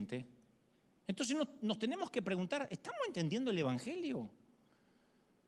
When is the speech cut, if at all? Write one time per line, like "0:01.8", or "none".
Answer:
none